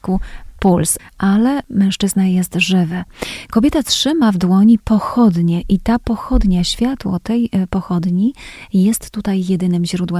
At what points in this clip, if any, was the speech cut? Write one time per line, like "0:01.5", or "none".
0:01.0